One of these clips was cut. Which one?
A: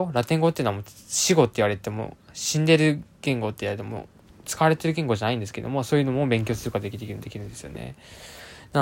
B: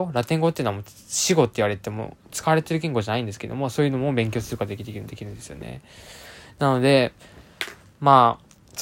B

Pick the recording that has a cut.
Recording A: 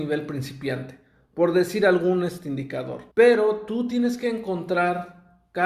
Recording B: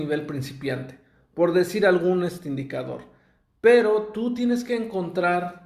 A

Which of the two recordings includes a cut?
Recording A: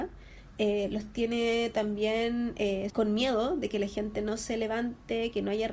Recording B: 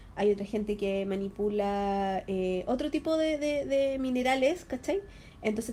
A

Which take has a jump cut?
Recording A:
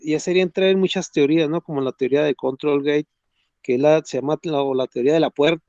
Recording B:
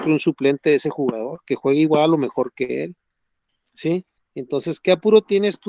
B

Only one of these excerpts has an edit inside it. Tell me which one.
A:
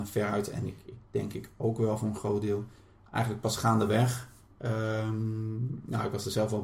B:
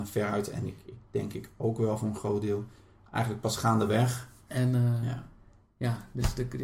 B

